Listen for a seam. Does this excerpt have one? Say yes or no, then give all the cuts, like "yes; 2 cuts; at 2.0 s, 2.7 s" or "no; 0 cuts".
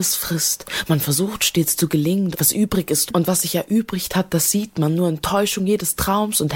yes; 1 cut; at 2.3 s